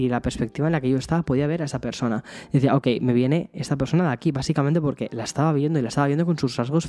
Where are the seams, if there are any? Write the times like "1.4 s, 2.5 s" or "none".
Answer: none